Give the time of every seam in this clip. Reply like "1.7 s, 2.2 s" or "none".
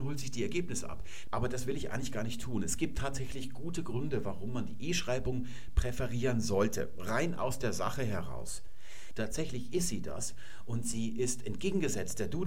1.3 s, 9.1 s

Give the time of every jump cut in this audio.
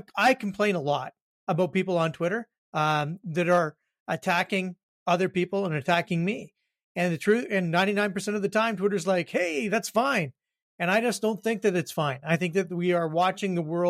none

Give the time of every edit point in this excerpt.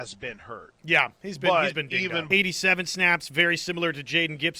2.3 s

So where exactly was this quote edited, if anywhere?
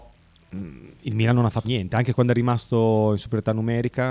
1.6 s

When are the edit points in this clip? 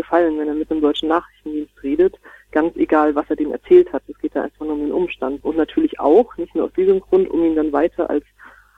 5.4 s

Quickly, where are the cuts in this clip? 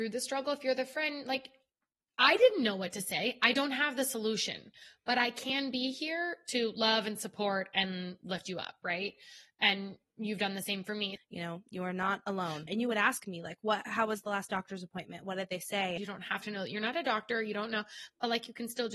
11.2 s, 12.7 s, 16.0 s

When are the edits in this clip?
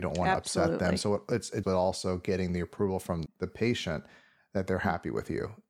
1.6 s, 3.3 s

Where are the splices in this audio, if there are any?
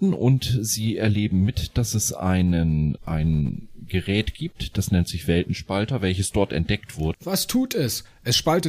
3.0 s, 7.1 s

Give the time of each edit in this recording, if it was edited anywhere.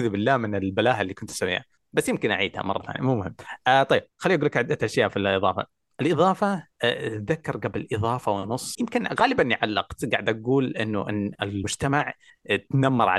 none

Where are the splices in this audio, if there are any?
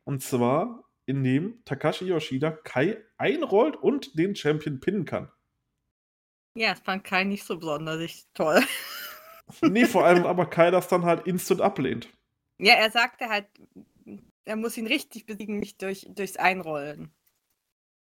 10.2 s

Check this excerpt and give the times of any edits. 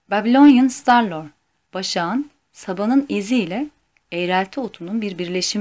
1.7 s

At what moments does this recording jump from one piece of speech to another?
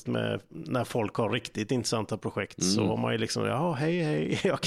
none

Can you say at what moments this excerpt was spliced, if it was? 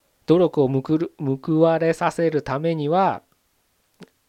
none

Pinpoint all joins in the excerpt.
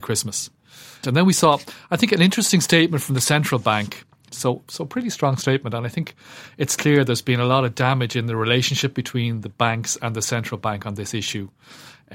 1.0 s, 4.3 s

